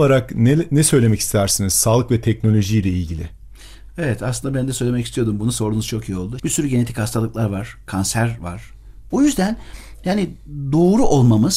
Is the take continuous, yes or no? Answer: no